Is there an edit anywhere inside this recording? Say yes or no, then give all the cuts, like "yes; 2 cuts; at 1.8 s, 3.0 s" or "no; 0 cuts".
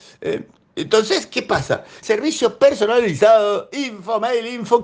yes; 1 cut; at 2.0 s